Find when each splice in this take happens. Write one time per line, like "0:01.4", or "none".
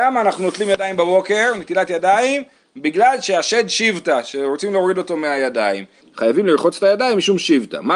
0:06.0